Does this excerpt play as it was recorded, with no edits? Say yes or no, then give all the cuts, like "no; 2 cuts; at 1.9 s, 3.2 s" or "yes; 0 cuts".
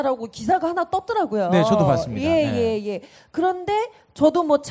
yes; 0 cuts